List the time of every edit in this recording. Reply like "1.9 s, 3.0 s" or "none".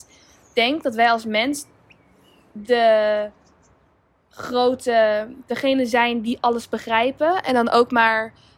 none